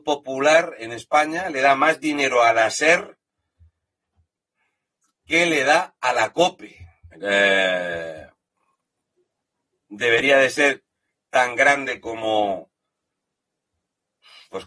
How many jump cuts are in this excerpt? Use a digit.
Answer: 1